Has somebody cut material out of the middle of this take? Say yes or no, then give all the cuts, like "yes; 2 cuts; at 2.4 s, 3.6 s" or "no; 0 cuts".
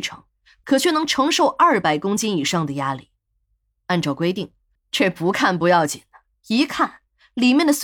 yes; 1 cut; at 4.7 s